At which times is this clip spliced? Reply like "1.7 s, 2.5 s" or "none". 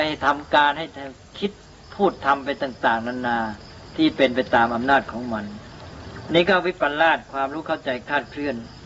none